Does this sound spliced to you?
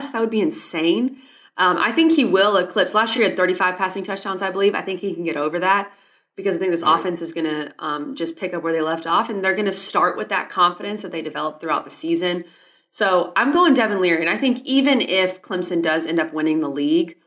no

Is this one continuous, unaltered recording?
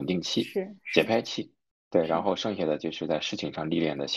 yes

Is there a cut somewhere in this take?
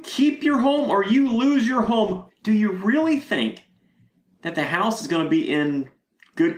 yes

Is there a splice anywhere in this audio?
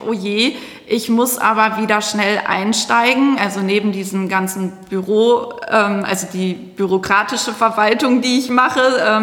no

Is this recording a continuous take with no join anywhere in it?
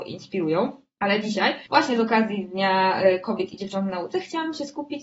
no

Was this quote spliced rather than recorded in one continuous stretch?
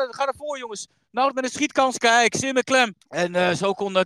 yes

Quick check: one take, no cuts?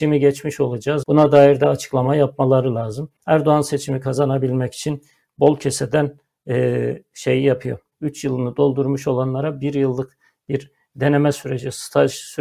no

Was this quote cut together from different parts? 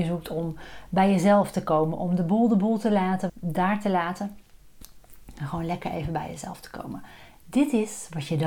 yes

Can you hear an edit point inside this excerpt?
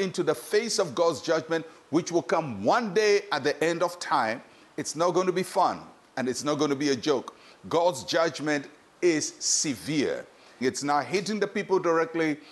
yes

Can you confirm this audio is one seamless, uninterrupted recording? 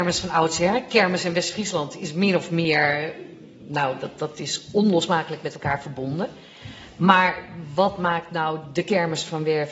yes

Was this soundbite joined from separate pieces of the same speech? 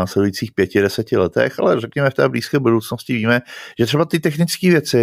no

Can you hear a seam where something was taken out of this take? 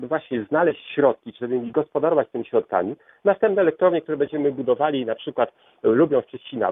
yes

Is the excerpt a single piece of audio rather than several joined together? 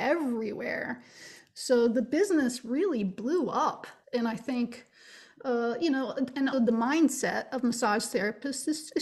no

